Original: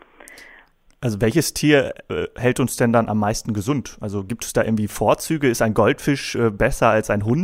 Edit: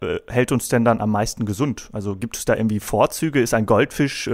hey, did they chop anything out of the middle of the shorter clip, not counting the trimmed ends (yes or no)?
no